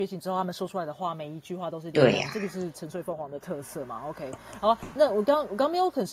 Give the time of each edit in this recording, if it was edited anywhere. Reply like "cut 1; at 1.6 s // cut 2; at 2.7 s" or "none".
cut 1; at 5.0 s